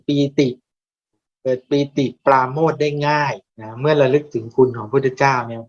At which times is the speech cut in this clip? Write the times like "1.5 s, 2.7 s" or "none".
3.5 s